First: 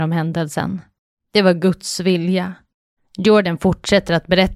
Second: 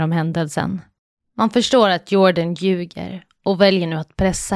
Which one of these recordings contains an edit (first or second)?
first